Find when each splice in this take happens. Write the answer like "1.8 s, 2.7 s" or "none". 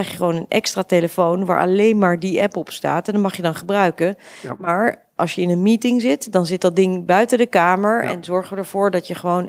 none